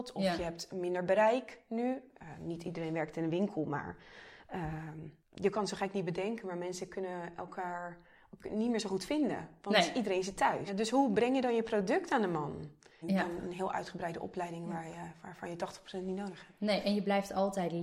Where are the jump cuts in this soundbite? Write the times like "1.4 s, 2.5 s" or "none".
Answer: 5.2 s, 10.7 s, 13.0 s